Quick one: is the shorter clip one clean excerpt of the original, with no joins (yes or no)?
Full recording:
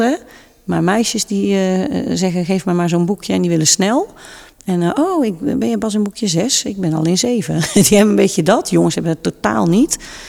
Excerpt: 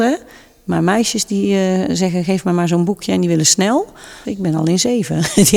no